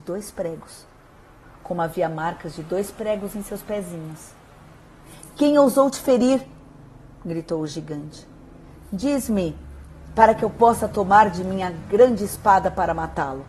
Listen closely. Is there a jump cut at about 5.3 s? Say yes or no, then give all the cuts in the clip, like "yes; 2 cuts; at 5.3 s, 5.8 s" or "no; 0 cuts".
no; 0 cuts